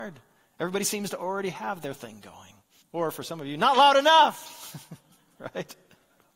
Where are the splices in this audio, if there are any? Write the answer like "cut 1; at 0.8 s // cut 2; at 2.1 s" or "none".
cut 1; at 2.8 s